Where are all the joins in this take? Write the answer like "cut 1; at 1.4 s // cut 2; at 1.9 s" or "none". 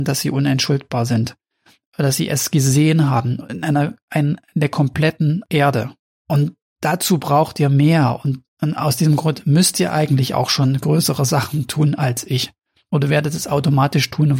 none